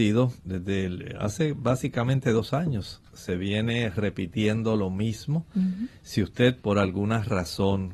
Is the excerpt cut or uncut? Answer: uncut